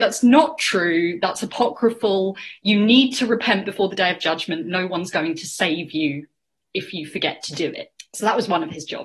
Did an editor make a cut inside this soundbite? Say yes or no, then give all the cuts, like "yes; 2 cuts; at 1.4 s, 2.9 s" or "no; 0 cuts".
no; 0 cuts